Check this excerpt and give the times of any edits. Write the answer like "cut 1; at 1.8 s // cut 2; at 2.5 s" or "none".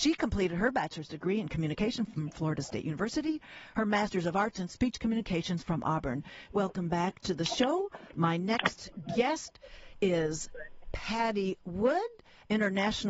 cut 1; at 6.5 s